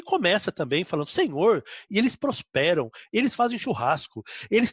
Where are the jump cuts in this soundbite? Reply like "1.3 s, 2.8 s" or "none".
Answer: 1.9 s